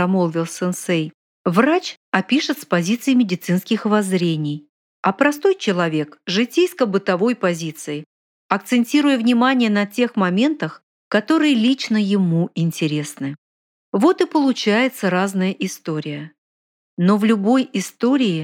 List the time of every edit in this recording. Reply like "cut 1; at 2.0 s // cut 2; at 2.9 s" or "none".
cut 1; at 1.3 s